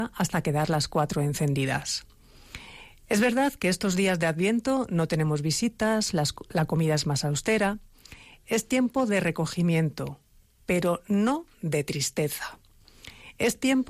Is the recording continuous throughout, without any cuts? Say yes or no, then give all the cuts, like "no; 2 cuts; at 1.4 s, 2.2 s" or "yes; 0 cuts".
yes; 0 cuts